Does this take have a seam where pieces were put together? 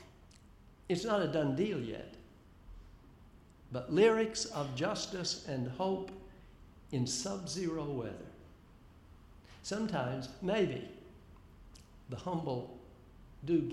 no; 0 cuts

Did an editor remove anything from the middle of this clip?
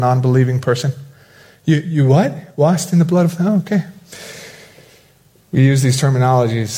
no; 0 cuts

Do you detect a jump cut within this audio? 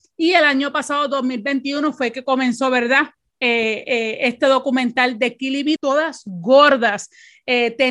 yes; 2 cuts; at 3.3 s, 5.8 s

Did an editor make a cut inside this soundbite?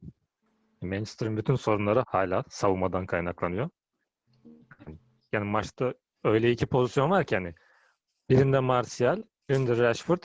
yes; 2 cuts; at 2.0 s, 5.3 s

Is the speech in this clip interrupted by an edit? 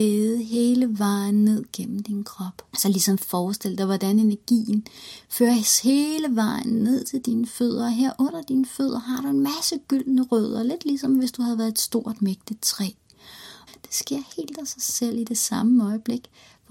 yes; 2 cuts; at 2.7 s, 13.7 s

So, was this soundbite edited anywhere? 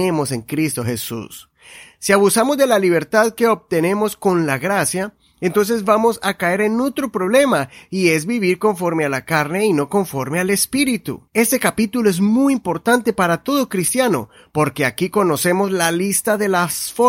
yes; 1 cut; at 11.3 s

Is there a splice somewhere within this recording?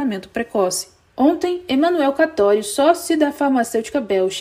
yes; 1 cut; at 1.1 s

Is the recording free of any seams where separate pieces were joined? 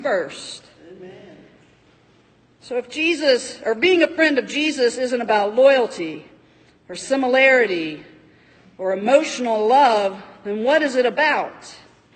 yes; 0 cuts

